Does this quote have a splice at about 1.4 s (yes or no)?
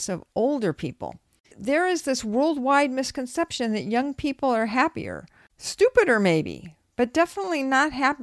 no